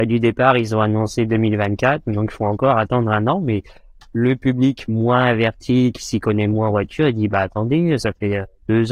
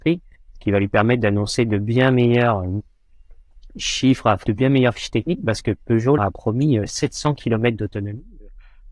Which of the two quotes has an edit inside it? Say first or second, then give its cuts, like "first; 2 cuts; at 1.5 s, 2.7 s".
second; 2 cuts; at 4.4 s, 6.2 s